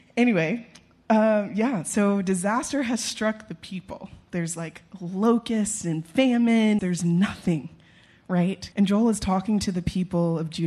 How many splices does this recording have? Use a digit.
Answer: 2